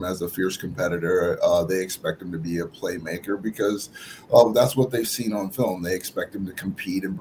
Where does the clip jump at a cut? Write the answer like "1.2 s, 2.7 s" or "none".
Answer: none